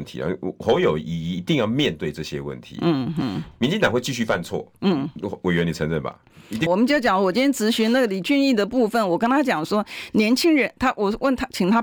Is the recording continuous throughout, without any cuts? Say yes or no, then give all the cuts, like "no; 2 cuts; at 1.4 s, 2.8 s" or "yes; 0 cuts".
no; 1 cut; at 6.7 s